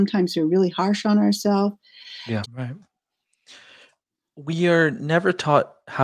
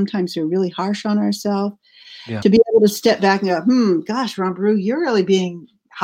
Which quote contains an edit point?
first; 1 cut; at 2.4 s

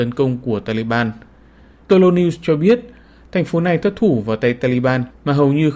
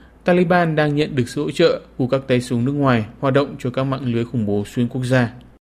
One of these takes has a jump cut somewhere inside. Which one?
first; 1 cut; at 1.9 s

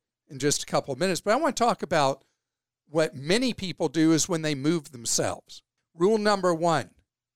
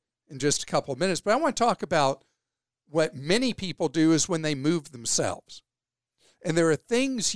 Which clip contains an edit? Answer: first; 1 cut; at 5.8 s

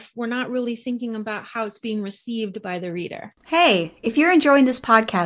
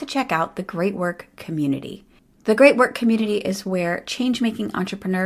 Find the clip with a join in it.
first; 1 cut; at 3.4 s

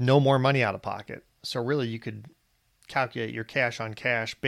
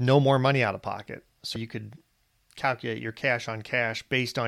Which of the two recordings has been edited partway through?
second; 1 cut; at 1.6 s

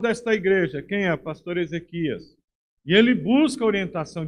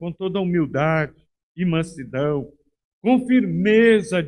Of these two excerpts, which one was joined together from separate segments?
first; 1 cut; at 2.8 s

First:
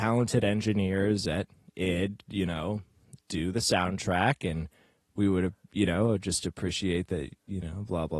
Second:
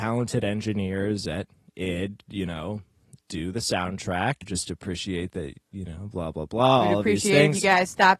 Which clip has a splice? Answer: second; 1 cut; at 4.4 s

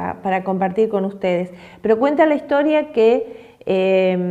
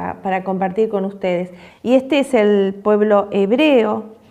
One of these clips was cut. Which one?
second; 1 cut; at 1.7 s

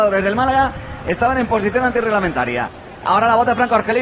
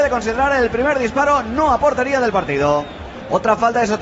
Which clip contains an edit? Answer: first; 1 cut; at 3.0 s

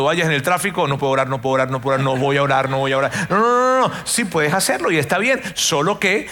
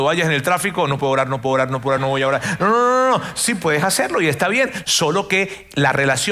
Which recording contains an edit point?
second; 2 cuts; at 2.0 s, 4.8 s

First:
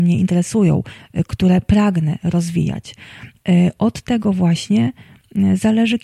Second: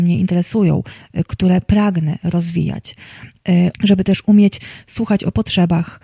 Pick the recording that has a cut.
second; 1 cut; at 3.7 s

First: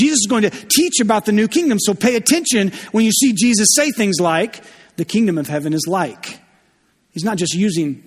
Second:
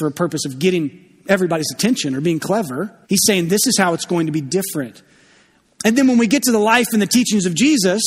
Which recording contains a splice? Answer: second; 2 cuts; at 3.0 s, 5.6 s

